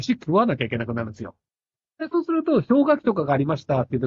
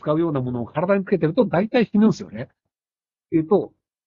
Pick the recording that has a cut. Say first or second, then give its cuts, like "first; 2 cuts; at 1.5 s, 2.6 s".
second; 1 cut; at 2.7 s